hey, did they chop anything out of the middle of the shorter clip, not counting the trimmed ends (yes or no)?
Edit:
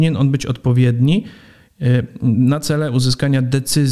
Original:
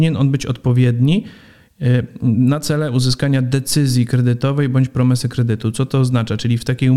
no